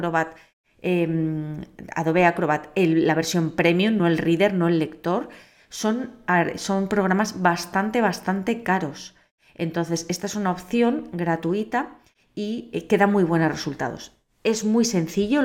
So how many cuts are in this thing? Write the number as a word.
zero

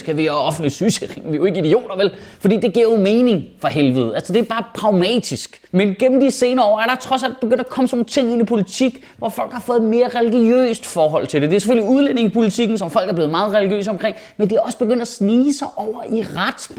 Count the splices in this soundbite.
one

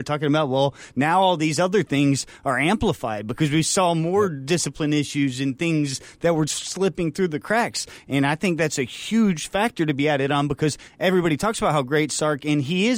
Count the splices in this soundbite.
one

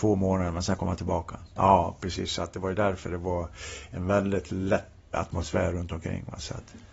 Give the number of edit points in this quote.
two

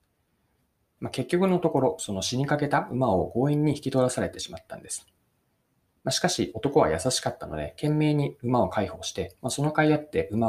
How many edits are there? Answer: one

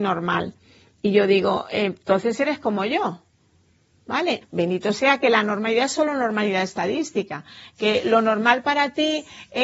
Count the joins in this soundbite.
one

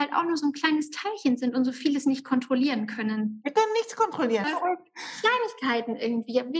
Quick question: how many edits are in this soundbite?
one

